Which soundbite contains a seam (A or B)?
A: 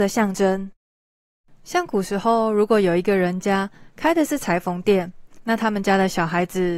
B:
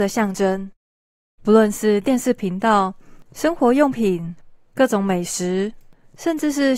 B